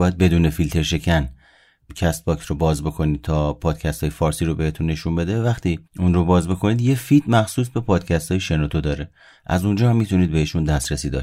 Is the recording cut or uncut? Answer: cut